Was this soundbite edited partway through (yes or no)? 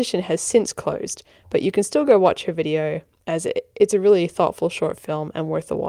no